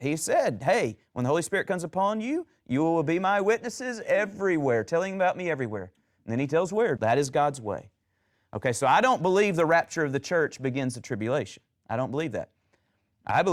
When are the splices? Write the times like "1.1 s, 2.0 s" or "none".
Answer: 7.0 s

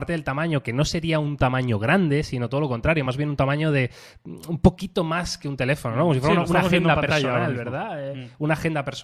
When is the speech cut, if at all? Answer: none

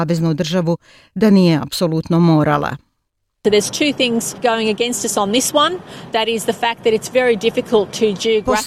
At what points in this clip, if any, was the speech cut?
4.4 s

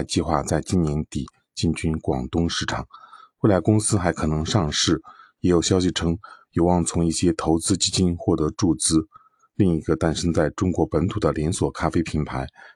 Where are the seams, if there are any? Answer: none

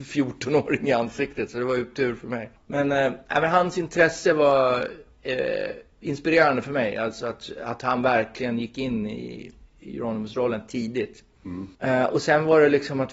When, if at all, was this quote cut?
11.7 s

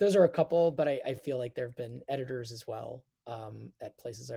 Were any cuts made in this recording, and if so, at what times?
none

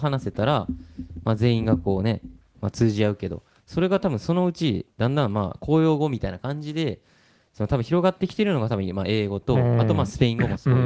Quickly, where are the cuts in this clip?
none

